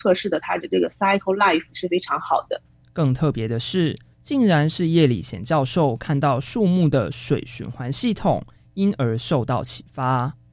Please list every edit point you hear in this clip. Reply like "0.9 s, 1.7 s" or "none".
2.8 s, 4.1 s